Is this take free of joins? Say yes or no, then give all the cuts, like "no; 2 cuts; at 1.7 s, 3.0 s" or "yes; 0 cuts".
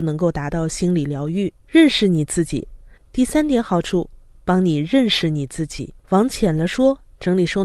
no; 3 cuts; at 1.6 s, 3.0 s, 6.0 s